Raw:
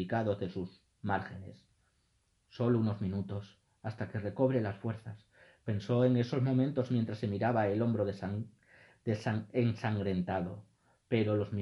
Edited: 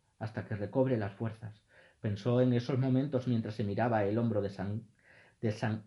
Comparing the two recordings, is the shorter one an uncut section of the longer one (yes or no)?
yes